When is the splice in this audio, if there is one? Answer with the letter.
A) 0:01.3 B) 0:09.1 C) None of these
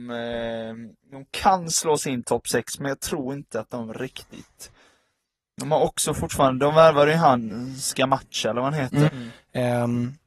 B